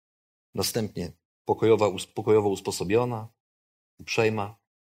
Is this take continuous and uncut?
yes; 0 cuts

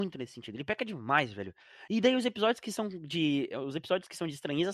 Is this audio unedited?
yes; 0 cuts

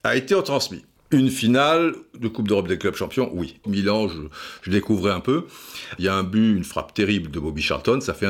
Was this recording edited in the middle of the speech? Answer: yes; 3 cuts; at 1.0 s, 3.6 s, 6.0 s

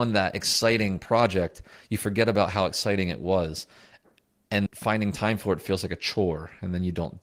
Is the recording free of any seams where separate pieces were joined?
no; 1 cut; at 4.7 s

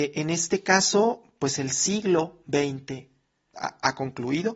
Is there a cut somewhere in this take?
yes; 1 cut; at 3.5 s

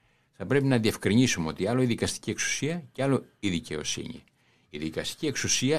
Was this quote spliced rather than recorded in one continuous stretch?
no; 0 cuts

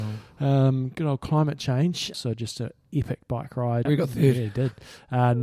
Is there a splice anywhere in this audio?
yes; 2 cuts; at 2.1 s, 3.9 s

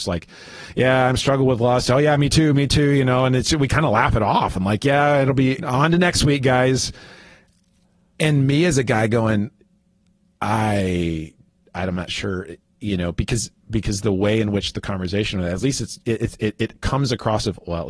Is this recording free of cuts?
no; 1 cut; at 5.6 s

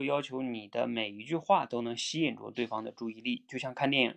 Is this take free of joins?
yes; 0 cuts

